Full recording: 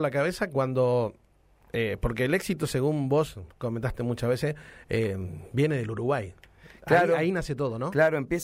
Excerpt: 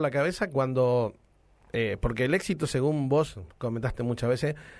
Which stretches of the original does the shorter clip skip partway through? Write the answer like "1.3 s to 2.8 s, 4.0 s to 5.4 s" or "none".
none